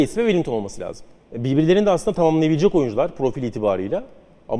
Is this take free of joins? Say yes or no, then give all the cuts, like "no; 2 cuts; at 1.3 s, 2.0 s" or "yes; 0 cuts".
no; 1 cut; at 1.2 s